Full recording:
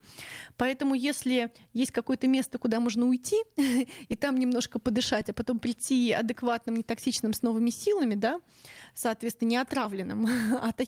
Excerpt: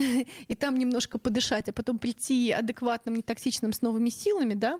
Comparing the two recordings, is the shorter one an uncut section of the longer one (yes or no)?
yes